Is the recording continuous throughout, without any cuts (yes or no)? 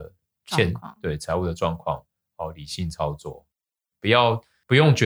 yes